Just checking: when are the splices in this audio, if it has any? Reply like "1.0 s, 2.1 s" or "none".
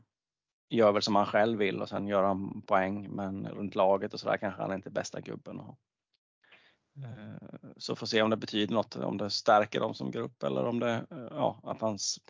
3.5 s